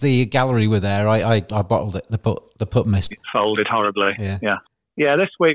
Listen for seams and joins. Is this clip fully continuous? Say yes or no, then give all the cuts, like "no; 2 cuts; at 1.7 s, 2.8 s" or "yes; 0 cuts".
yes; 0 cuts